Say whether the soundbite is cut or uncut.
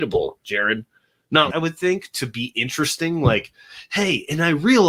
cut